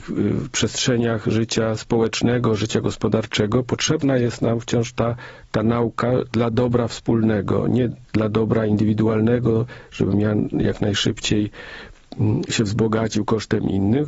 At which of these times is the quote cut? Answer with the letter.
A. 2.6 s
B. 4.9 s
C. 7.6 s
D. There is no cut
D